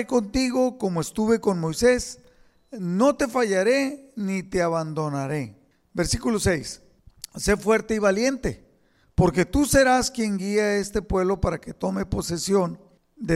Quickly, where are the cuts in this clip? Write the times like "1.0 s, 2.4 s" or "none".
none